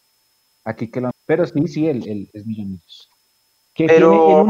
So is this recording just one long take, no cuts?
no; 2 cuts; at 1.1 s, 2.3 s

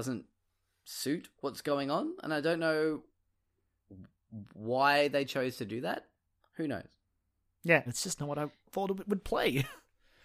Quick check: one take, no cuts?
no; 1 cut; at 7.9 s

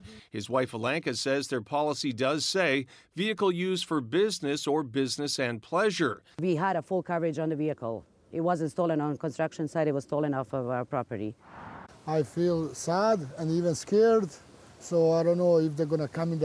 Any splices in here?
yes; 2 cuts; at 6.3 s, 11.9 s

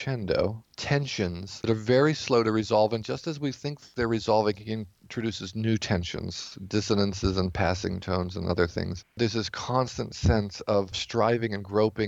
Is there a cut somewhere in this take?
no; 0 cuts

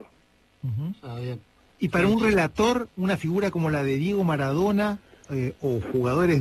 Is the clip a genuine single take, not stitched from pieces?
yes; 0 cuts

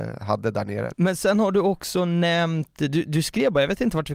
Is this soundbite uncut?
no; 1 cut; at 0.9 s

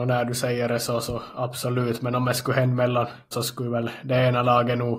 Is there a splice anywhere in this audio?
yes; 1 cut; at 3.3 s

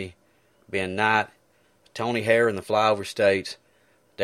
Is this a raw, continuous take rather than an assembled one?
yes; 0 cuts

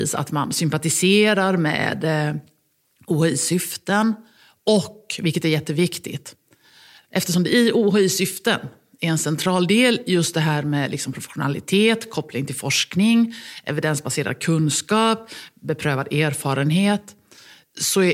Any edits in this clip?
no; 0 cuts

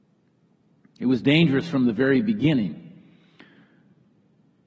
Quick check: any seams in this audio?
no; 0 cuts

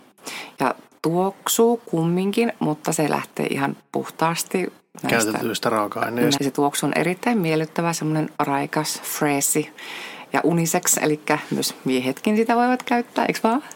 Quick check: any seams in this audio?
yes; 1 cut; at 6.4 s

